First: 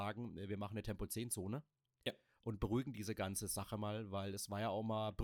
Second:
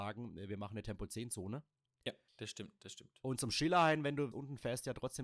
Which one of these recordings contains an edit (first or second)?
second